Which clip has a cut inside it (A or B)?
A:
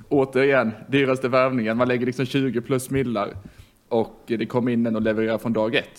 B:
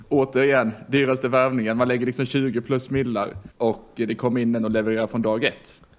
B